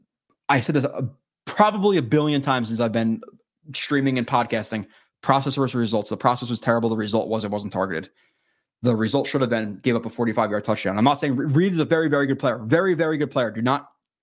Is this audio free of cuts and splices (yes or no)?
yes